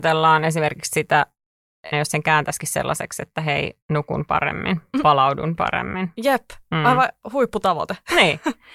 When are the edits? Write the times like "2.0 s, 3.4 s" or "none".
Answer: 1.9 s, 3.8 s